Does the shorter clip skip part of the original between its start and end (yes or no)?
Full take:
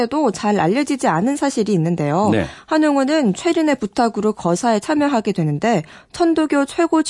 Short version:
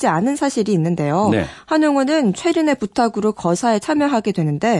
no